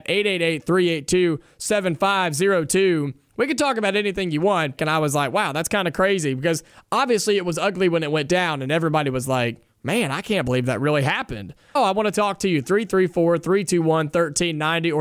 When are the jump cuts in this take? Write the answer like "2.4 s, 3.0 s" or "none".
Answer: 4.8 s, 11.8 s